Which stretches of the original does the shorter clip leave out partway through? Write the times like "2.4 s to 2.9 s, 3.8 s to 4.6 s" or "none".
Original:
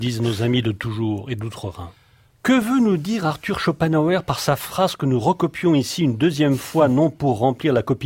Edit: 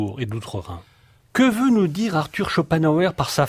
none